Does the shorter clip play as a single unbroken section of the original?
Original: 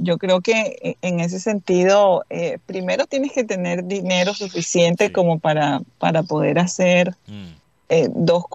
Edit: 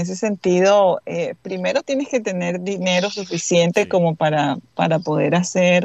yes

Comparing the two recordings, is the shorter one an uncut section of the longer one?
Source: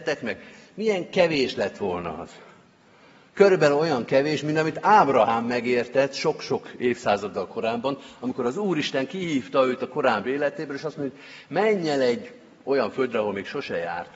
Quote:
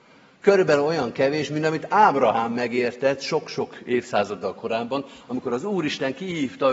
yes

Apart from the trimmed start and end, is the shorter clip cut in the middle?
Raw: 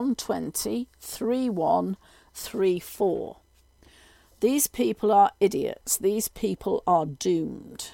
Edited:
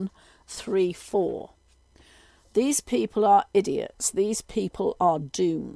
no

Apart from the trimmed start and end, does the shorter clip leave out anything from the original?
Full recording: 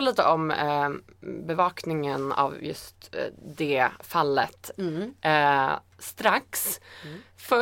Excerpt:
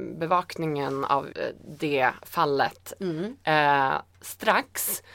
yes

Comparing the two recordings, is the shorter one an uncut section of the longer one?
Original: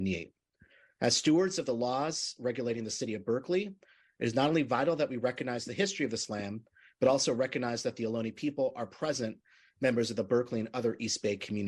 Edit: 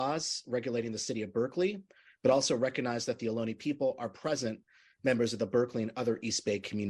no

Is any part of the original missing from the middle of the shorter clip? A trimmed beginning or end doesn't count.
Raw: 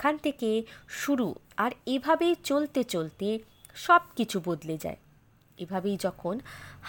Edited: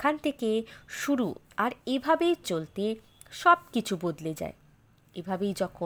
yes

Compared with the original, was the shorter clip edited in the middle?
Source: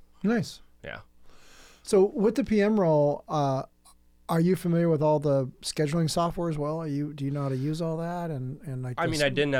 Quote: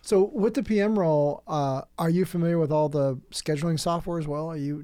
yes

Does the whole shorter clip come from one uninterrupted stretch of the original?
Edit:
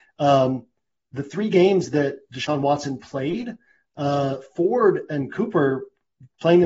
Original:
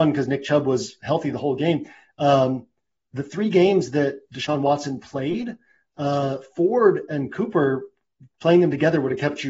yes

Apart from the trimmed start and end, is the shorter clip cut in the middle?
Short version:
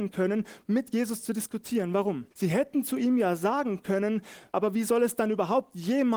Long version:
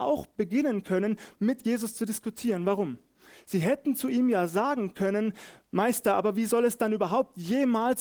yes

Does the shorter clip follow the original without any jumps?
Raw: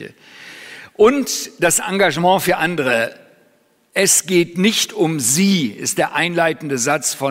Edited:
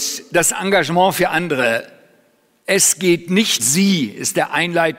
no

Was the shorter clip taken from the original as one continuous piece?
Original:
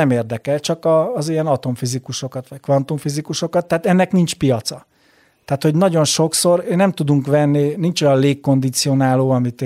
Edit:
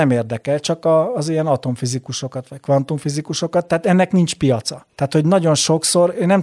no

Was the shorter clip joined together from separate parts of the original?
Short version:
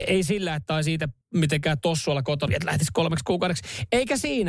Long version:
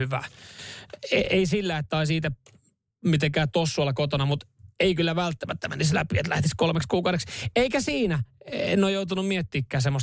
yes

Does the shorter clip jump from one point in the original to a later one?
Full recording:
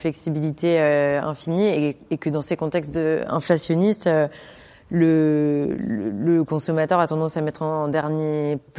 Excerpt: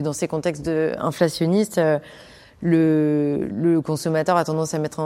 yes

